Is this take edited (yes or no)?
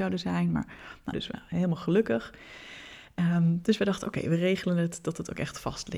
yes